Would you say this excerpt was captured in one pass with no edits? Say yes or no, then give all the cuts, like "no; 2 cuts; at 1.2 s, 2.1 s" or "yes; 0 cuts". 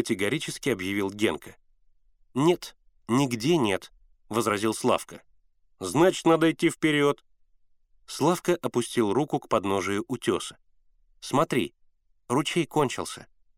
yes; 0 cuts